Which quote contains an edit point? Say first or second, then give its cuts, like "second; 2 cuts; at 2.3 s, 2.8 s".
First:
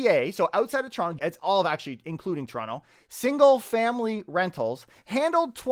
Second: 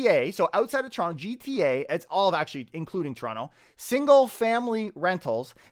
first; 1 cut; at 1.2 s